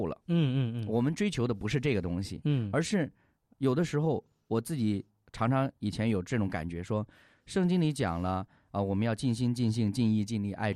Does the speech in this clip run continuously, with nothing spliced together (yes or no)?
yes